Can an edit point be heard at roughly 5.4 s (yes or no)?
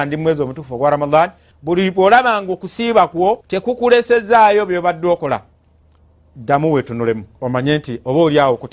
no